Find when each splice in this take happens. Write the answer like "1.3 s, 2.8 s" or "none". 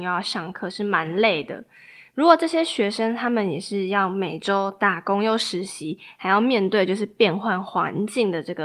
none